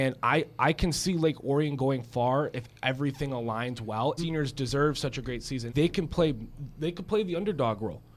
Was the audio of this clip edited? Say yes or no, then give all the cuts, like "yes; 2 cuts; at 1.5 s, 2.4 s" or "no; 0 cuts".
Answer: yes; 2 cuts; at 4.2 s, 5.7 s